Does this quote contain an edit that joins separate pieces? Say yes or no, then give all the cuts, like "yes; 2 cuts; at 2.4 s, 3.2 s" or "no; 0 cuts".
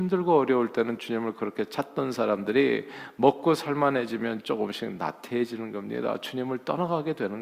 no; 0 cuts